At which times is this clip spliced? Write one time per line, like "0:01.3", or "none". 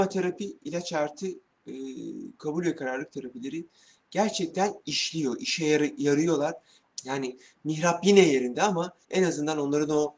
0:06.8
0:09.0